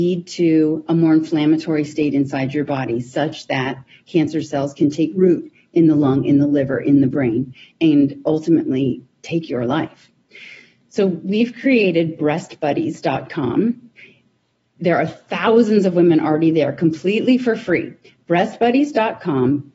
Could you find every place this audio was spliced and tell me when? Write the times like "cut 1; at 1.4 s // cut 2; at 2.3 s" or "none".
none